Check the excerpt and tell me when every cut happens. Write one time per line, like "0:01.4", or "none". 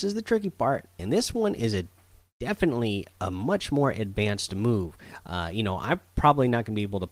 0:01.0